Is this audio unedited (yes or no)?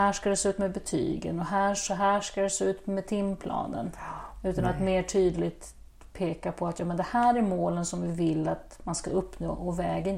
yes